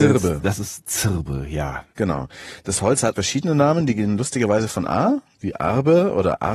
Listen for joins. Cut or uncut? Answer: cut